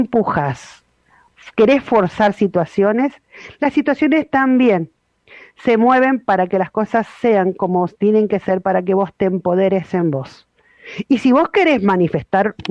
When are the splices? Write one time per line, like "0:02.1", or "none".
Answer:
none